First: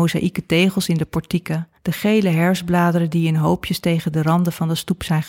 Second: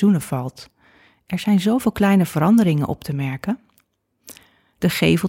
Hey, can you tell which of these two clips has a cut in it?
first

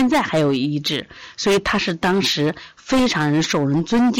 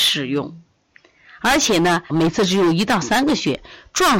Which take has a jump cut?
second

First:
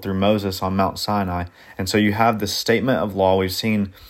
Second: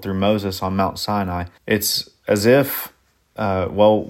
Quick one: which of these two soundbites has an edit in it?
second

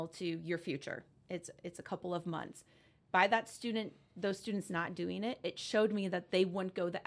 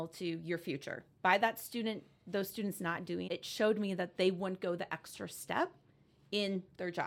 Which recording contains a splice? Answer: second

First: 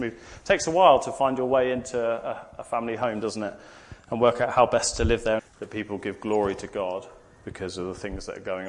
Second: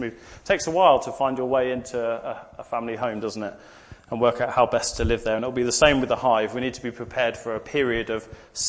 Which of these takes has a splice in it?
first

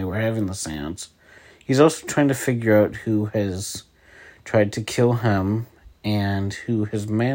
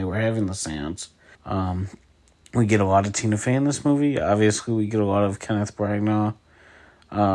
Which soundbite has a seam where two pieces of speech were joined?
second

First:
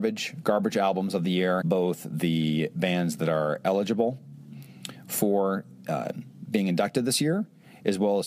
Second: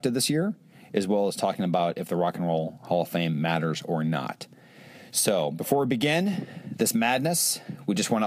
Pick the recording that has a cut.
first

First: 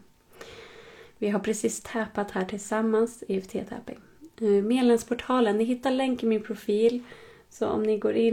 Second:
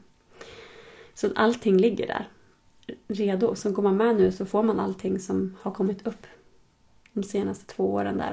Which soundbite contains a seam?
second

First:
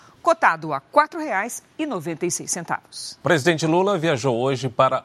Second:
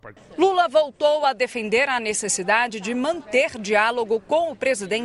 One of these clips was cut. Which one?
first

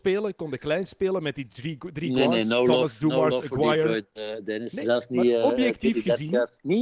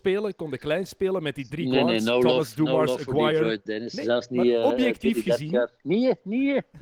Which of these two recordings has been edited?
second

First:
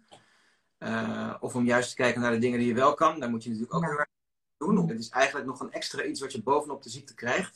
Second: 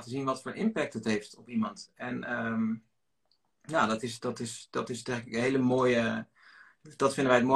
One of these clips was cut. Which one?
first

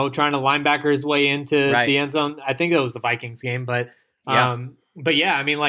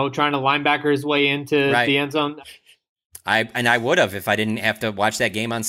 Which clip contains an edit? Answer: second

